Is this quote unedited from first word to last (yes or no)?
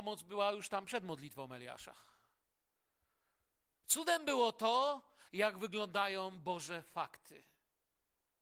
no